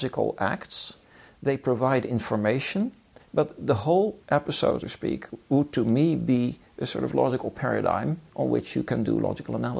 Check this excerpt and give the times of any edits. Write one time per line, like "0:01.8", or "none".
0:03.2
0:04.8